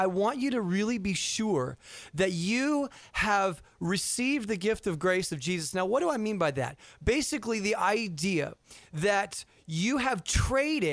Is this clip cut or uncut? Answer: uncut